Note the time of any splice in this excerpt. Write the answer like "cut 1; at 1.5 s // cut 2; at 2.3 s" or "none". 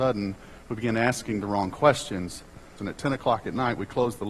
cut 1; at 2.8 s